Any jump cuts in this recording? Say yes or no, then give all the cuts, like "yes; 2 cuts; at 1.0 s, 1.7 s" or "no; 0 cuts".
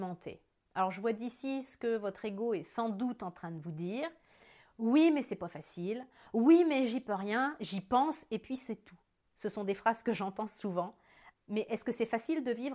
yes; 1 cut; at 11.3 s